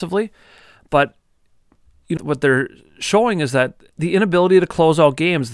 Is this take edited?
yes; 2 cuts; at 2.2 s, 3.9 s

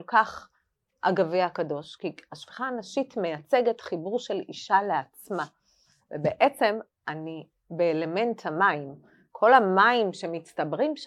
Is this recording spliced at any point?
no; 0 cuts

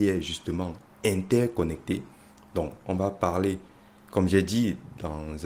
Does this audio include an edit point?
no; 0 cuts

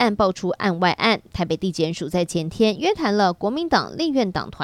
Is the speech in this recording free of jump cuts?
yes; 0 cuts

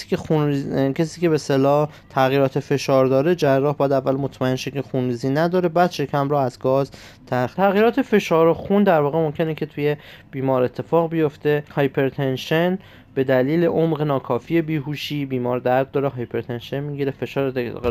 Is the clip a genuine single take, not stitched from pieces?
no; 2 cuts; at 7.5 s, 11.7 s

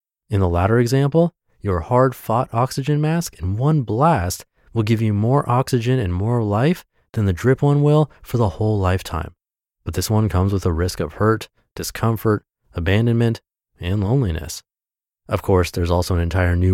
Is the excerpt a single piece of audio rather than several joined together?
yes; 0 cuts

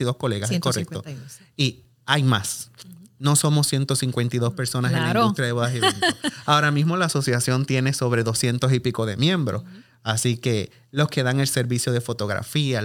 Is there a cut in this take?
no; 0 cuts

